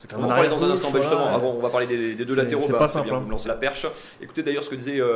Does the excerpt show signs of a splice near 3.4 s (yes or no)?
yes